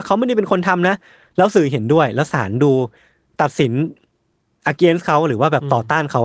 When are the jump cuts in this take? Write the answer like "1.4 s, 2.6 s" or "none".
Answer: none